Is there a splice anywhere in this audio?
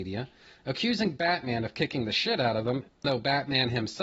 yes; 1 cut; at 3.0 s

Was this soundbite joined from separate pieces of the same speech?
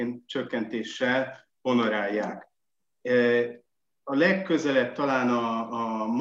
no; 0 cuts

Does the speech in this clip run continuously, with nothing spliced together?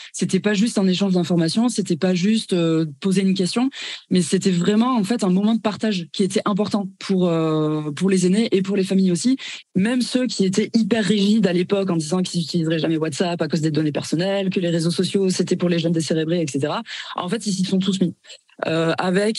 no; 1 cut; at 9.6 s

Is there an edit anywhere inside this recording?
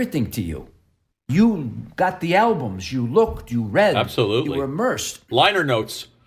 no; 0 cuts

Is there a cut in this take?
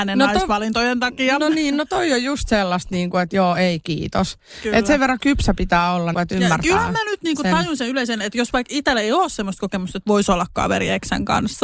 yes; 1 cut; at 6.1 s

